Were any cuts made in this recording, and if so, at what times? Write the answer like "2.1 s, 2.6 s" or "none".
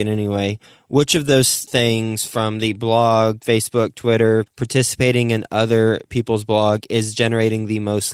4.5 s